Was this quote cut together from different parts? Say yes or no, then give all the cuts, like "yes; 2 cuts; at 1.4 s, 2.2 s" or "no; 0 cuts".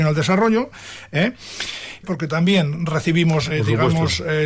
yes; 2 cuts; at 2.0 s, 3.5 s